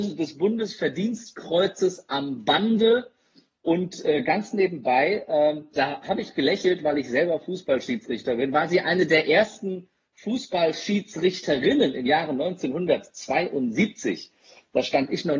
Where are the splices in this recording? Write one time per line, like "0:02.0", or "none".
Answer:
0:05.7